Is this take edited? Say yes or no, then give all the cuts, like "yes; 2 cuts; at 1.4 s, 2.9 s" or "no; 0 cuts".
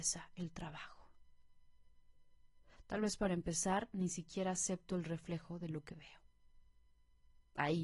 no; 0 cuts